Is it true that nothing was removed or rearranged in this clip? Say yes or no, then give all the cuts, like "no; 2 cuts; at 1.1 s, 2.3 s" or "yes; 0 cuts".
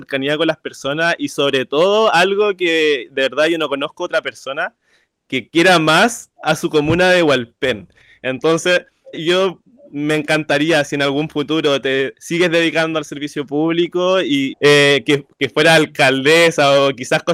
no; 2 cuts; at 9.1 s, 14.5 s